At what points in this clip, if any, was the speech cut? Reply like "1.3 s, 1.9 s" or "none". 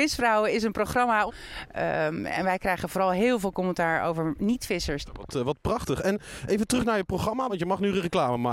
1.3 s, 5.0 s, 7.5 s